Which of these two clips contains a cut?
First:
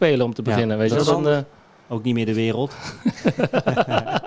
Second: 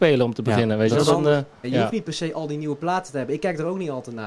second; 1 cut; at 1.6 s

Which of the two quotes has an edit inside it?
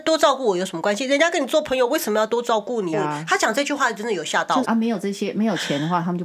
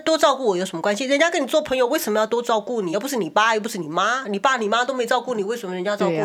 first; 2 cuts; at 2.9 s, 4.6 s

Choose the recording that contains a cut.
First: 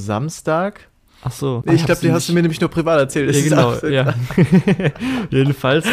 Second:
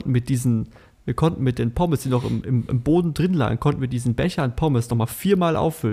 first; 1 cut; at 1.6 s

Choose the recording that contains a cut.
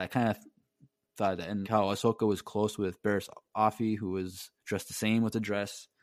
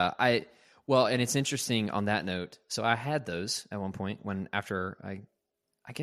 first; 2 cuts; at 1.6 s, 4.6 s

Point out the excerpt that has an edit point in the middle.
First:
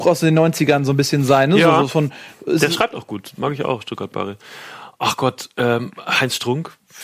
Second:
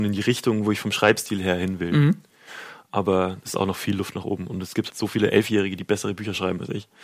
second; 1 cut; at 4.9 s

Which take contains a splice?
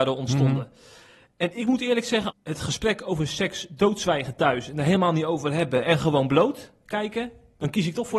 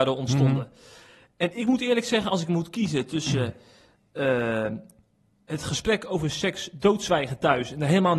first; 1 cut; at 2.3 s

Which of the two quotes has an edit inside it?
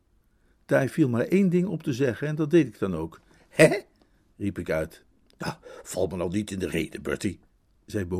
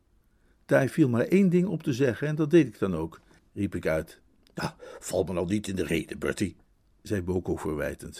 second; 1 cut; at 3.4 s

